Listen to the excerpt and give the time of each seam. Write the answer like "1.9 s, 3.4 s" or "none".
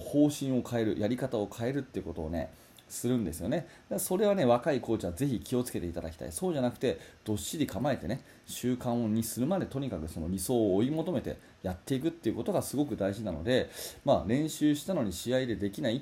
none